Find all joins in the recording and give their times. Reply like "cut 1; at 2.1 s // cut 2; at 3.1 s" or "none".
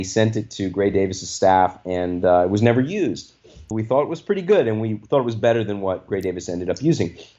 cut 1; at 3.7 s